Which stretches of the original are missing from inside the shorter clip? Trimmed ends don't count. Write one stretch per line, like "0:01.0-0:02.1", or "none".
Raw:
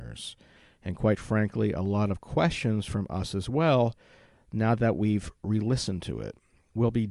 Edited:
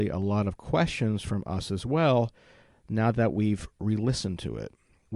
none